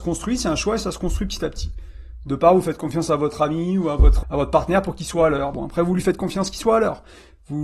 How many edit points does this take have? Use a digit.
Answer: 2